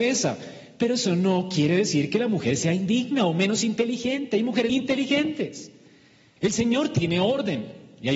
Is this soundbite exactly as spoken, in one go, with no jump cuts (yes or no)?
no